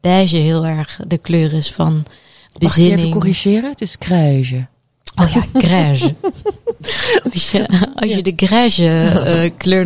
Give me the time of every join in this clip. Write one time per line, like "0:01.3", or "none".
none